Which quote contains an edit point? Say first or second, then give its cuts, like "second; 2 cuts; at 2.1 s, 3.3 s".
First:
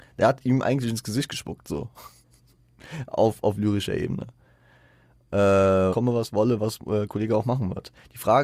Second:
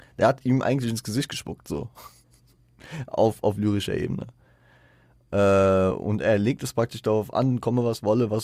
first; 1 cut; at 5.9 s